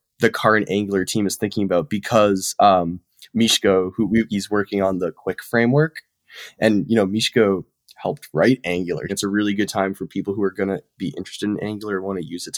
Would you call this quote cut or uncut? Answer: cut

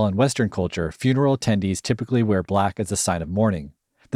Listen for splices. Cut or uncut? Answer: uncut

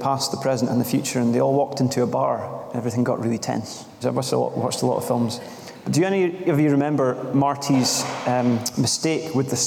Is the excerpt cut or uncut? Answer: cut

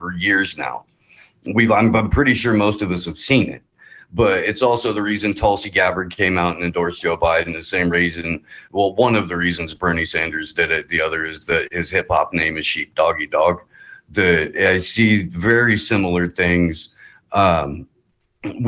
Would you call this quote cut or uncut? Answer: uncut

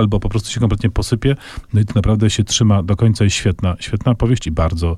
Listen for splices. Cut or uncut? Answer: uncut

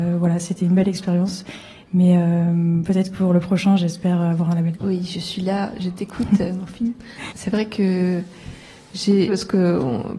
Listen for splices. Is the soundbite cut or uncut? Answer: cut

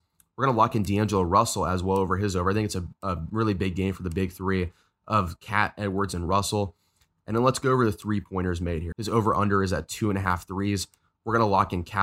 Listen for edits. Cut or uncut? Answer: cut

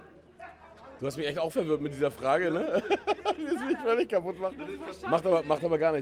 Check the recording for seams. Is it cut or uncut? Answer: uncut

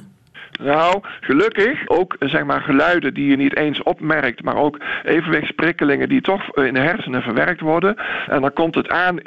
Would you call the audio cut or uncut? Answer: cut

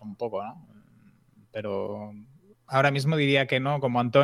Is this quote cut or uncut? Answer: uncut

